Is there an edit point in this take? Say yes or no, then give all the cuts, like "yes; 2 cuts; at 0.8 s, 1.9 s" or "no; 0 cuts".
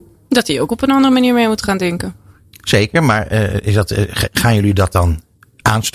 no; 0 cuts